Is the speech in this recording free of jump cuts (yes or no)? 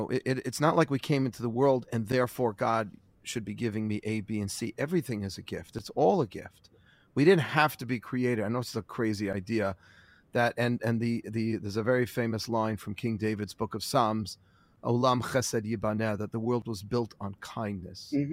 yes